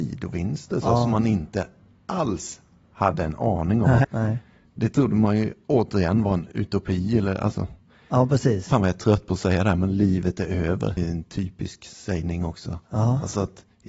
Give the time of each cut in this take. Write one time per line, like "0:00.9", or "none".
0:04.0
0:11.0